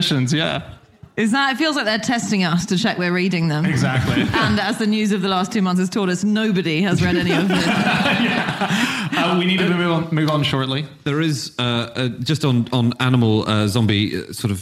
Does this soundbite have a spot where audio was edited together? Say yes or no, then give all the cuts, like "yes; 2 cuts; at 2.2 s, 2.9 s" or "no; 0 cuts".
no; 0 cuts